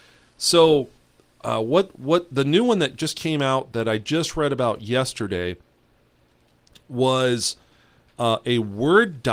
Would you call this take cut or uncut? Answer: uncut